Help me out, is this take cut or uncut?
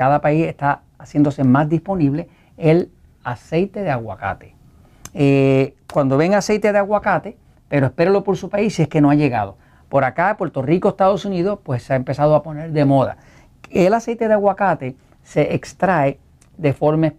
cut